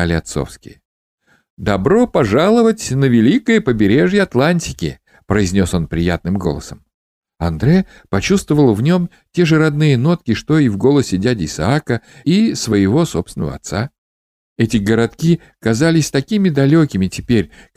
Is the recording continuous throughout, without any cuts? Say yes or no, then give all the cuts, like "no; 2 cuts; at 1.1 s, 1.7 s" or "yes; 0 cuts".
yes; 0 cuts